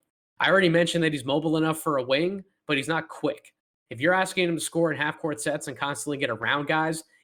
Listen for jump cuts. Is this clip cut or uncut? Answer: uncut